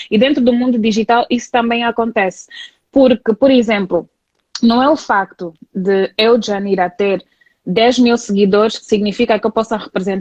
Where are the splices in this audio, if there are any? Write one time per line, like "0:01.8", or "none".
none